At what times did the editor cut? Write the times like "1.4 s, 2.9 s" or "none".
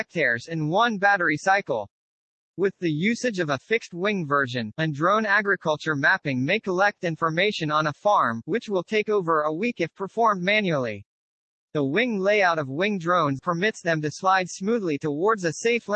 13.4 s